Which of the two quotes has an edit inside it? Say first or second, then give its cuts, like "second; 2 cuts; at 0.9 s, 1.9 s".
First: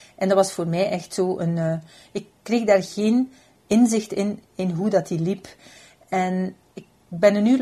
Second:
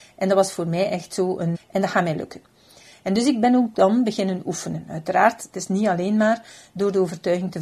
second; 1 cut; at 1.5 s